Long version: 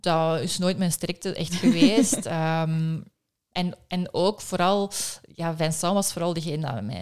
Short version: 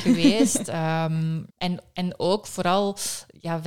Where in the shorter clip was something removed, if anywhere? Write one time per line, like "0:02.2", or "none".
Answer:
0:01.5